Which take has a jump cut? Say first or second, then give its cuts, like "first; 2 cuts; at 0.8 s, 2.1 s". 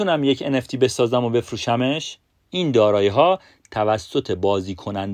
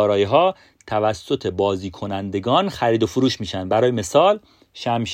first; 1 cut; at 2.4 s